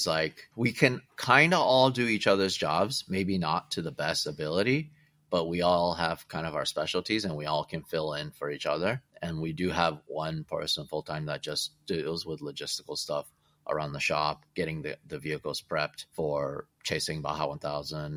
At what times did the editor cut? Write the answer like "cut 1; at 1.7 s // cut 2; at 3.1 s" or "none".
none